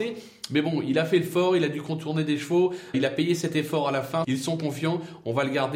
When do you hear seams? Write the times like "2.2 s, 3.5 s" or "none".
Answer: 2.9 s, 4.2 s